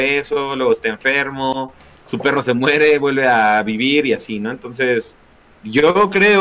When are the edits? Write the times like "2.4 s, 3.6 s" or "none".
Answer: none